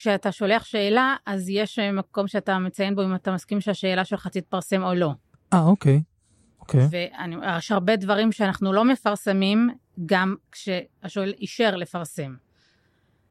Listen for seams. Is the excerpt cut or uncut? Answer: uncut